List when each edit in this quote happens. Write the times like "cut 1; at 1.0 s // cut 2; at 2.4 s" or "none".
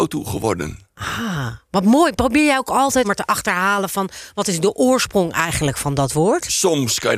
cut 1; at 3.0 s